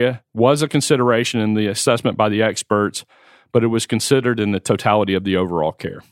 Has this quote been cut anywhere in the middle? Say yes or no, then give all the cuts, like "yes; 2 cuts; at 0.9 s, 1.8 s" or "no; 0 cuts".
no; 0 cuts